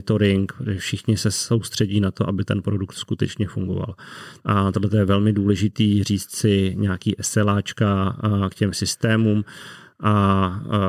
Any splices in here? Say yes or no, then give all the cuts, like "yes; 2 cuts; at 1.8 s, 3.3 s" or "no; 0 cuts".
yes; 1 cut; at 4.4 s